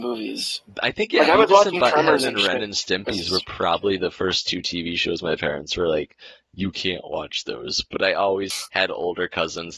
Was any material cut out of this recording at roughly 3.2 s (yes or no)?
no